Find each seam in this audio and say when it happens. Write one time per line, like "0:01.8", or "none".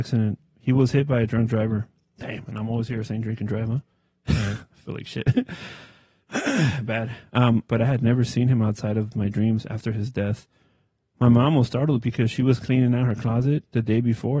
0:07.7